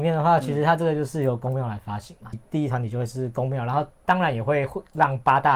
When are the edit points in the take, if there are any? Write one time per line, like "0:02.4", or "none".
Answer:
0:02.3